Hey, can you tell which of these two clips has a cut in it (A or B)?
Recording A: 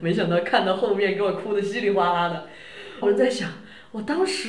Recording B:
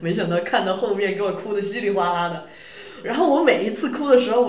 A